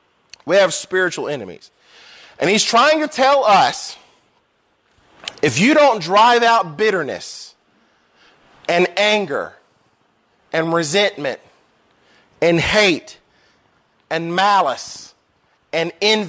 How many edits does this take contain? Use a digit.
0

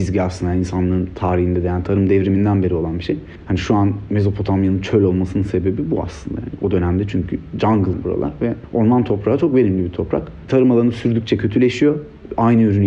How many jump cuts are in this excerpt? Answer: 1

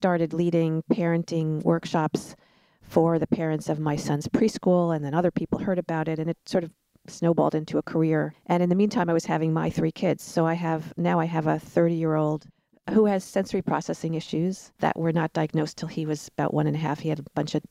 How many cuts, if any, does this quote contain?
1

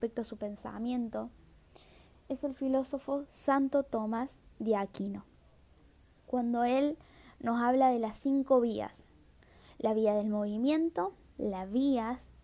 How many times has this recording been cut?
1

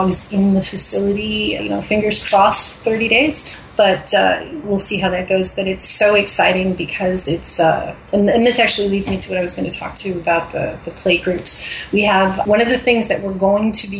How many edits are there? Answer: 1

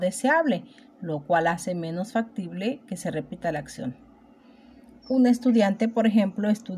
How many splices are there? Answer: 0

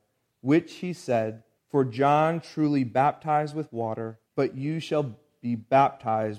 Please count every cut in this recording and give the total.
2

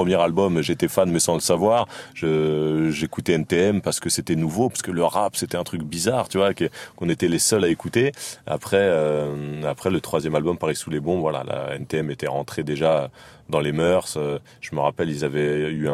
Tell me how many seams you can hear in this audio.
0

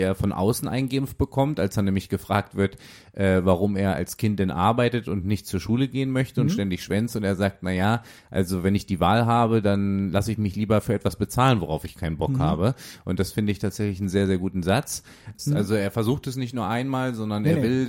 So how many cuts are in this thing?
1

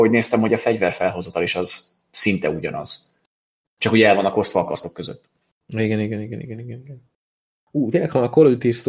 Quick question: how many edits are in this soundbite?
1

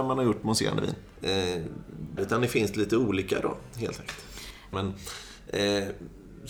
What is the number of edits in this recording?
3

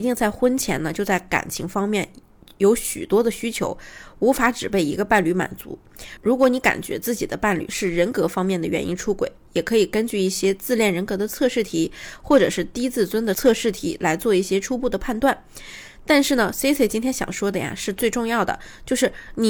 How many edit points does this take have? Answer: 0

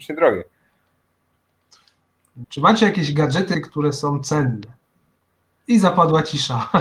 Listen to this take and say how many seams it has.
2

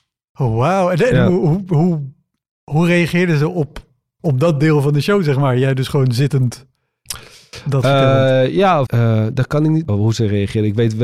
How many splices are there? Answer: 2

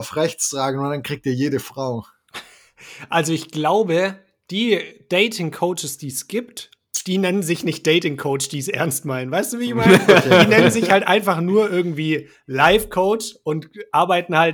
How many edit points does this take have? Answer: 0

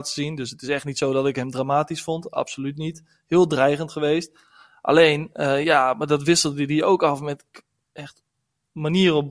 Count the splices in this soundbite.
0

